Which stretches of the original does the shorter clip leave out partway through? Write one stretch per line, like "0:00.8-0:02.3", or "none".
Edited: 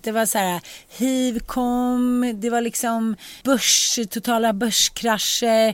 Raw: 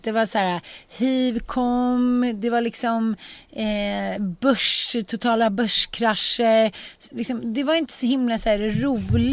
0:03.4-0:04.4